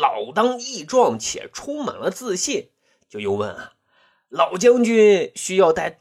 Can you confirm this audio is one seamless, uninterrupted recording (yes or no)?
yes